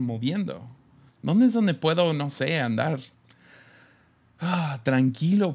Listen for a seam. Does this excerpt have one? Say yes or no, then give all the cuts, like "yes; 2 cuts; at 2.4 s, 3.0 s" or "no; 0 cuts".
yes; 1 cut; at 1.1 s